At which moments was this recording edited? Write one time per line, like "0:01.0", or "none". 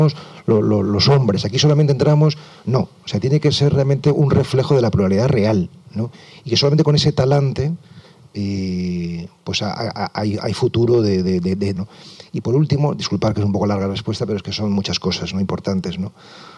0:11.8

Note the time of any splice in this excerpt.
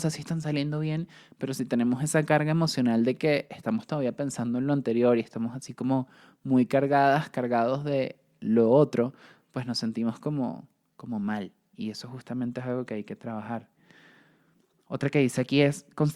none

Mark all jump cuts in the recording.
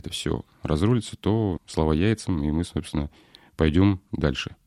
0:01.6

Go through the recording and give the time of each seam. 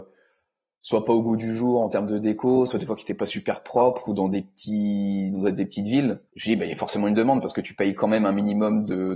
0:06.3

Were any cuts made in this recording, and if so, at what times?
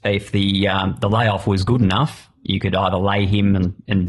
none

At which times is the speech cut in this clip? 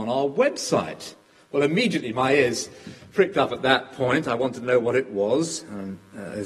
none

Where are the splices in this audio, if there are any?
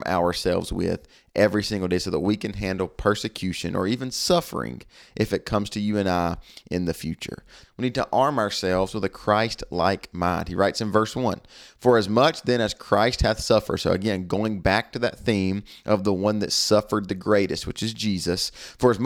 0:07.6

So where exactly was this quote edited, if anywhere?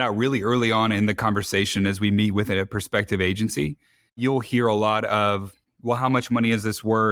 none

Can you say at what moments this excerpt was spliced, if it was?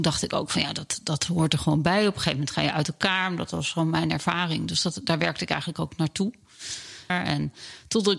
0:07.1

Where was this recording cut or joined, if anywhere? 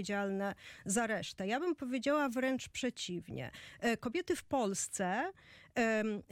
none

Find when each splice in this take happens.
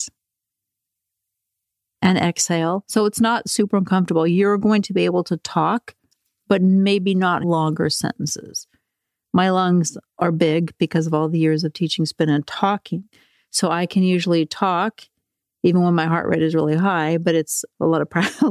none

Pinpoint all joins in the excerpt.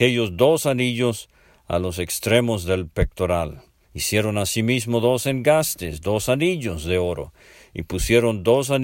0:03.8

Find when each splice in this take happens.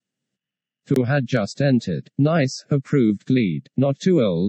none

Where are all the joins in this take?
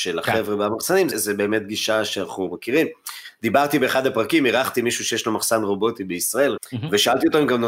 0:01.1
0:06.6

